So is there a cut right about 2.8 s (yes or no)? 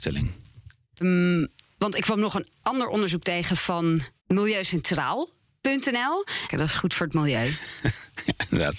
no